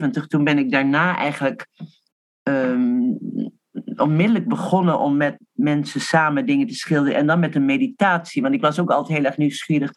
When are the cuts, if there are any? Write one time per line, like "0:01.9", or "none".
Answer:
none